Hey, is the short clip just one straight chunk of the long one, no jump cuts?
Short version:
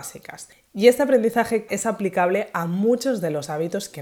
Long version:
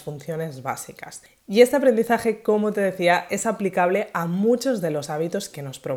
no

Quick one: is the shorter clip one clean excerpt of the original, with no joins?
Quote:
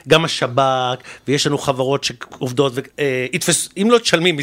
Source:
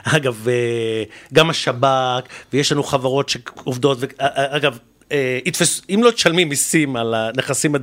no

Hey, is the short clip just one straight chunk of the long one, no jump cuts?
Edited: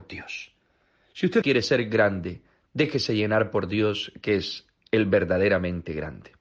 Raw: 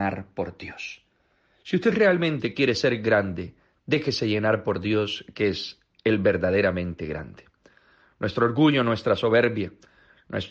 no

